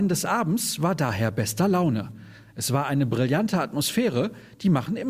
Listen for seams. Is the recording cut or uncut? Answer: uncut